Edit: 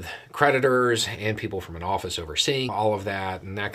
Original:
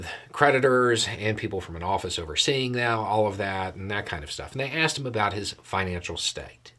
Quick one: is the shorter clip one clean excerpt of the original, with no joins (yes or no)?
no